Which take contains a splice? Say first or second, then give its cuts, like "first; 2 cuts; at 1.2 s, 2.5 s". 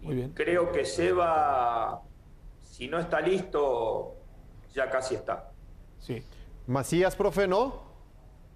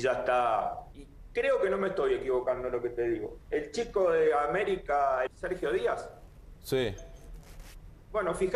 second; 2 cuts; at 0.9 s, 5.3 s